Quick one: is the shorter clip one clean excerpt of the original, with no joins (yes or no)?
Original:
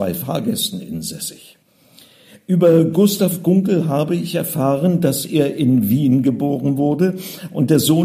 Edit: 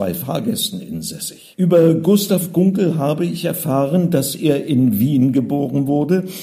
no